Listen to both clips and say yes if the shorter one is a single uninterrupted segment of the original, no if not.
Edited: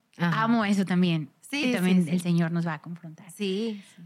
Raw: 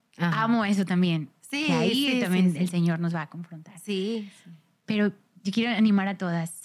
no